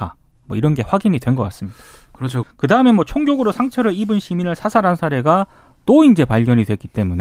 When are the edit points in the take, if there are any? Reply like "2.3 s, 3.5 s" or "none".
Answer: 2.4 s